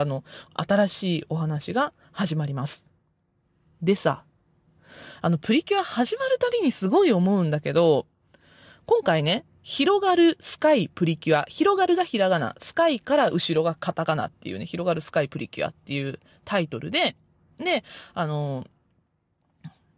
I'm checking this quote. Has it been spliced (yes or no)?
no